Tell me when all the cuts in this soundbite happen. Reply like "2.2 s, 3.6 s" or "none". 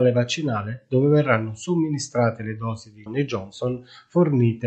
3.1 s